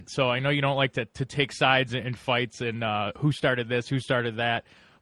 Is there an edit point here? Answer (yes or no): no